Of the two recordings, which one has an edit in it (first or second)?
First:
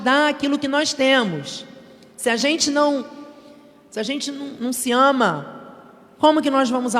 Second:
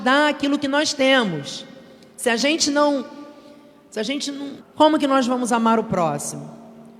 second